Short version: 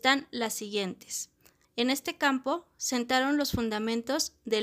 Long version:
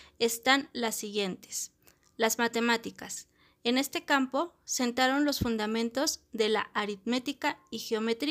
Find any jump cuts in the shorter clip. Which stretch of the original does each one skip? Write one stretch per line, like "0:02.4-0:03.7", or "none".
0:02.1-0:03.5